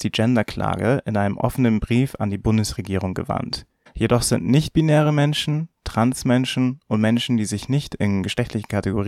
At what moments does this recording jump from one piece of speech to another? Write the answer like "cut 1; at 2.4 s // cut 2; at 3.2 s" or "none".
cut 1; at 3.9 s

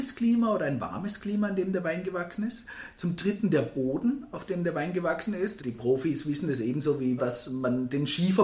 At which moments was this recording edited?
cut 1; at 5.6 s // cut 2; at 7.2 s

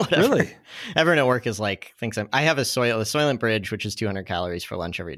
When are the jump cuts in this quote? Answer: none

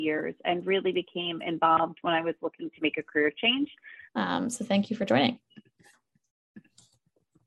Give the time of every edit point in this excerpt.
cut 1; at 4.1 s

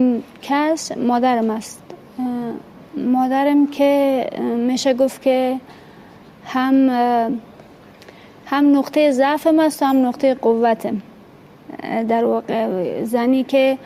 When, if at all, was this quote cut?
none

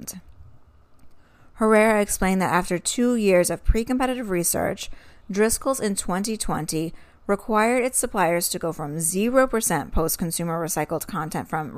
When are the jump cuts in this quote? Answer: none

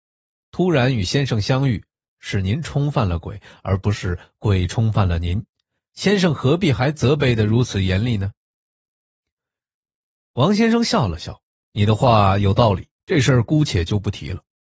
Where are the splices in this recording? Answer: cut 1; at 5.8 s // cut 2; at 11.7 s // cut 3; at 12.9 s

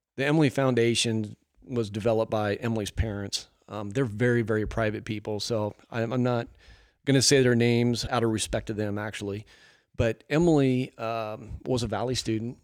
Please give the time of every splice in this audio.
cut 1; at 8.1 s

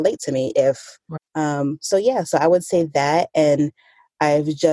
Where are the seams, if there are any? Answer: cut 1; at 1.2 s

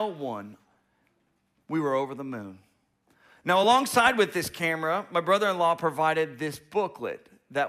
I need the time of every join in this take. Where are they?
none

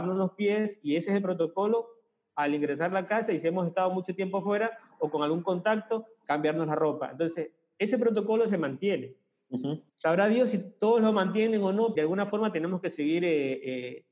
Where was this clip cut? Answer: cut 1; at 9.9 s // cut 2; at 11.9 s

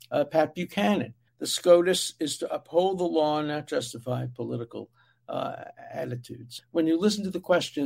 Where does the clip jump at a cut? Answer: cut 1; at 1.3 s // cut 2; at 6.6 s

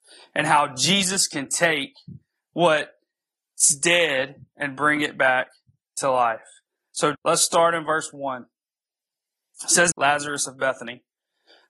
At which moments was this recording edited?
cut 1; at 7.1 s // cut 2; at 9.9 s

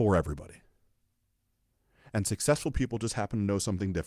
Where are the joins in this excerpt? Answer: none

